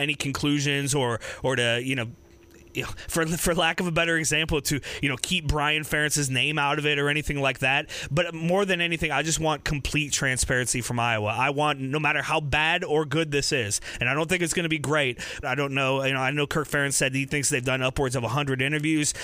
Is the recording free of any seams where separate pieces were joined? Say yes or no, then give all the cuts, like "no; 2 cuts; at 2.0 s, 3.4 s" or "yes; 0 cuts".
no; 1 cut; at 15.4 s